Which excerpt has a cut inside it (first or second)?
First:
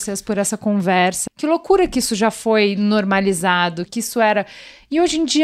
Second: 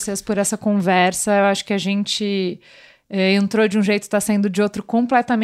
first